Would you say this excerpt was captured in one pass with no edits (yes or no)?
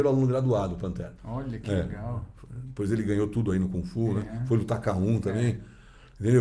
yes